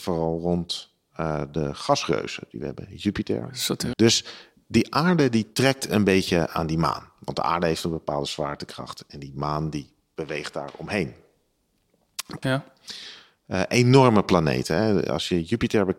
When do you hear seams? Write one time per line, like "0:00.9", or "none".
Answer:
0:03.9
0:12.4